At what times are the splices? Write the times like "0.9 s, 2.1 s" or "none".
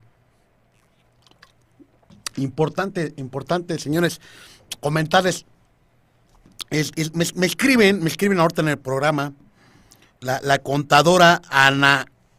none

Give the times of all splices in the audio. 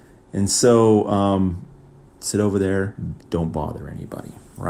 2.0 s, 3.2 s

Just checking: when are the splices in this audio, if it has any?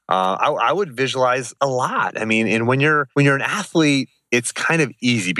3.1 s

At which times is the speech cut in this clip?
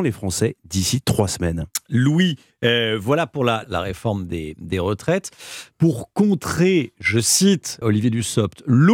3.6 s, 7.8 s

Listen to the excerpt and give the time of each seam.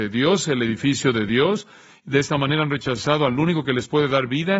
none

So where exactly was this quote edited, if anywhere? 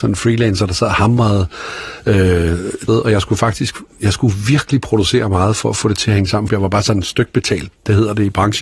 2.9 s, 6.5 s

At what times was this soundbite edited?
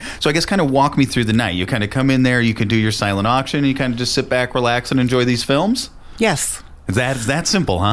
none

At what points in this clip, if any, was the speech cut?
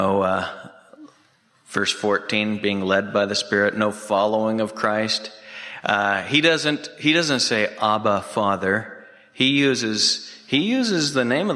none

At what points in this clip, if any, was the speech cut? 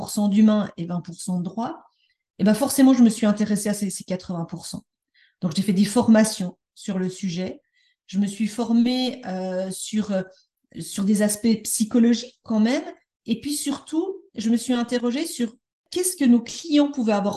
none

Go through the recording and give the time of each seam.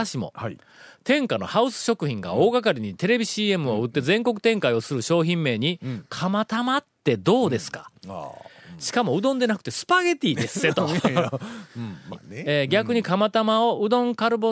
12.1 s

